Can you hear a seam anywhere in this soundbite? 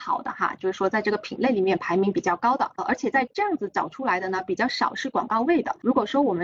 no; 0 cuts

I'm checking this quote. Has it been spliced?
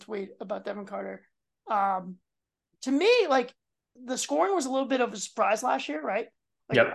yes; 1 cut; at 4.0 s

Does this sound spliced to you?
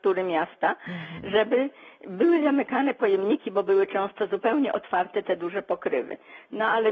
no; 0 cuts

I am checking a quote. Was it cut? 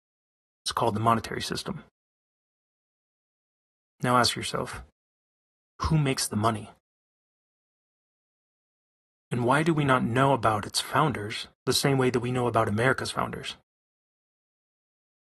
yes; 2 cuts; at 9.2 s, 11.5 s

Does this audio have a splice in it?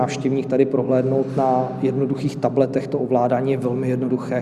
no; 0 cuts

